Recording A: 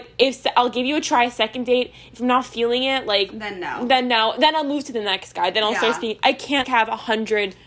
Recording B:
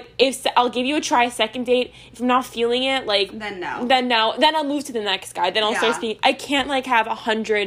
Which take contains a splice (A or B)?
A